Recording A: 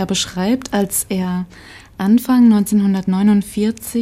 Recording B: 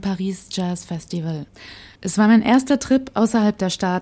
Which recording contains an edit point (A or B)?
B